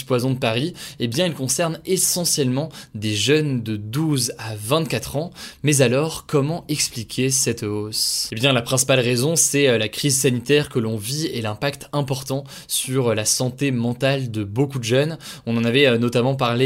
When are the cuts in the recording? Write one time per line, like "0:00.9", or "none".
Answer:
none